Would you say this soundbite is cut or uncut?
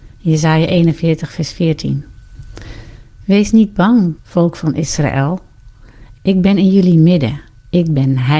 cut